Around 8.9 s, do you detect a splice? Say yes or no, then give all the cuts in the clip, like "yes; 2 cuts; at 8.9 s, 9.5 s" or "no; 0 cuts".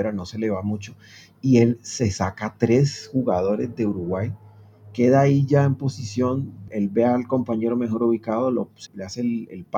yes; 2 cuts; at 6.7 s, 8.9 s